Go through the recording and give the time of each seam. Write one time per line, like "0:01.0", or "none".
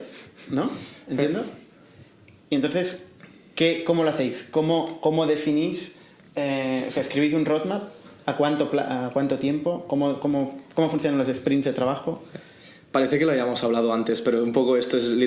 none